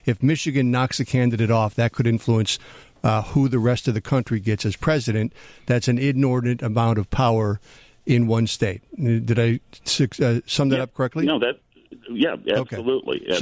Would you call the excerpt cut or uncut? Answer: uncut